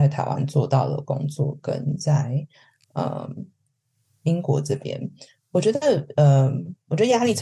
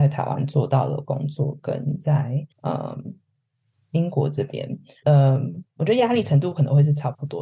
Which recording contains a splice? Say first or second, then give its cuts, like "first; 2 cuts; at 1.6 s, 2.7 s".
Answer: second; 2 cuts; at 2.5 s, 5.0 s